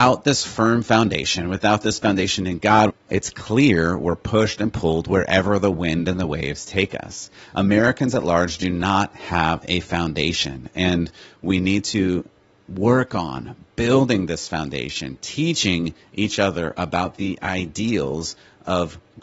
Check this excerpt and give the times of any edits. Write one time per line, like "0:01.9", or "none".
0:02.9